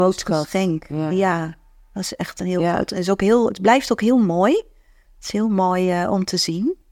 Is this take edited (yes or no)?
no